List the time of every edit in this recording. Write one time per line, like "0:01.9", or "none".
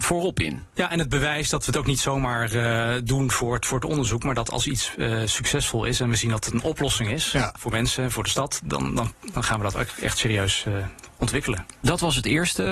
none